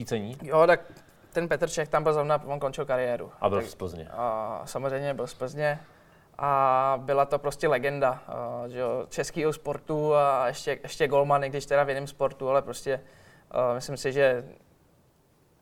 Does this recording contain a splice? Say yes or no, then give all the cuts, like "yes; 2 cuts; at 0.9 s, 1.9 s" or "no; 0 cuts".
no; 0 cuts